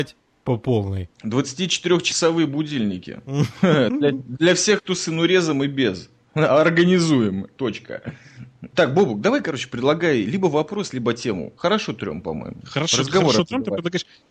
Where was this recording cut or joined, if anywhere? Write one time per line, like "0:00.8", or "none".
0:01.1
0:08.7
0:11.6